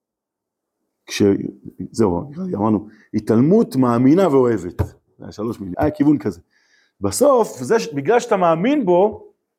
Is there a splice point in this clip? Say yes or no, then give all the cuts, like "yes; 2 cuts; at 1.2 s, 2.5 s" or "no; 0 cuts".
yes; 1 cut; at 5.7 s